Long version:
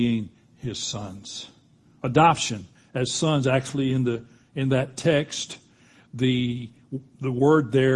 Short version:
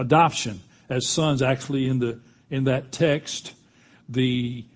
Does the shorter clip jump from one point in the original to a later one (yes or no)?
no